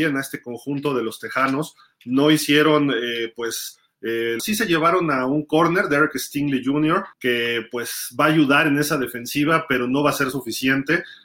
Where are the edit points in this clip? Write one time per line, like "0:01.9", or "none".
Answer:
0:04.4
0:07.1